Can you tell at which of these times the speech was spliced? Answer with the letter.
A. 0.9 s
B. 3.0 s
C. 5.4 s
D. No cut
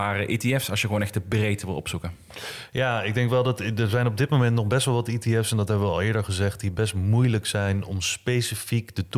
D